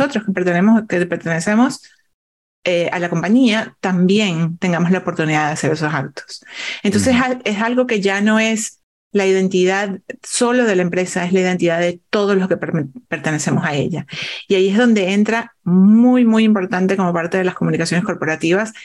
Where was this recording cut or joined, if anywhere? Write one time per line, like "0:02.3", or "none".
none